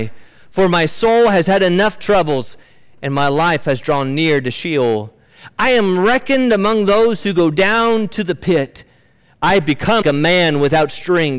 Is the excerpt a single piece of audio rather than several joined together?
no; 1 cut; at 10.0 s

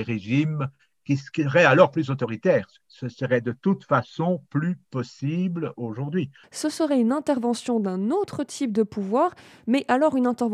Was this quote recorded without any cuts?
no; 1 cut; at 6.4 s

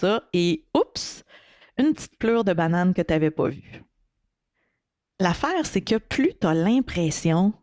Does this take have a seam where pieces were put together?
no; 0 cuts

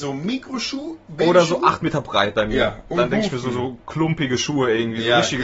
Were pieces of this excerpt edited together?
no; 0 cuts

